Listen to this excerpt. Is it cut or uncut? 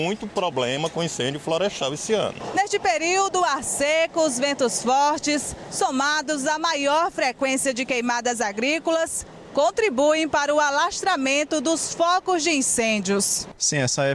uncut